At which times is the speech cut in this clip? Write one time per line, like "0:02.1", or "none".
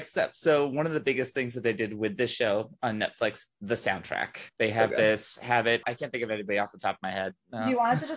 0:04.5
0:05.8